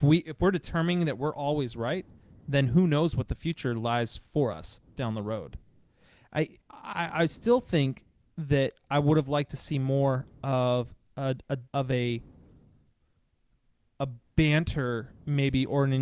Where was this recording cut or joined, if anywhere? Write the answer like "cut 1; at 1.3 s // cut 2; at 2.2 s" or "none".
cut 1; at 6.6 s // cut 2; at 11.7 s